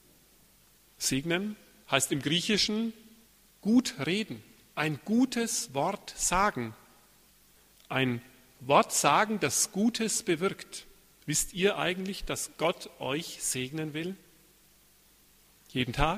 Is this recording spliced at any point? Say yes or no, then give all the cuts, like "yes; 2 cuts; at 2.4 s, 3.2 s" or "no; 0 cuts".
no; 0 cuts